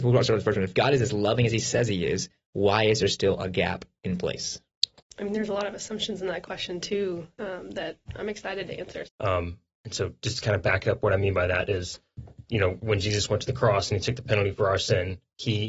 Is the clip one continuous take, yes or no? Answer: no